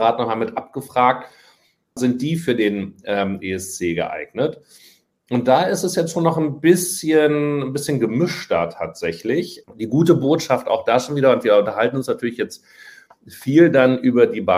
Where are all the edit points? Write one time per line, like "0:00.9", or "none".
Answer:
0:02.0
0:09.6